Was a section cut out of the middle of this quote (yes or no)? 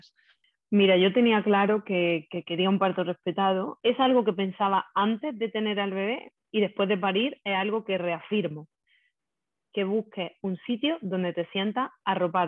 yes